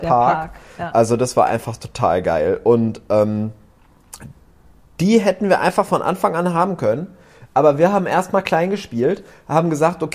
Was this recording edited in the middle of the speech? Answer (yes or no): no